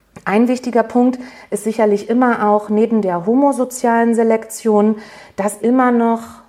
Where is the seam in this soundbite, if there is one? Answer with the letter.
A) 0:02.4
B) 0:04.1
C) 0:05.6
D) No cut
C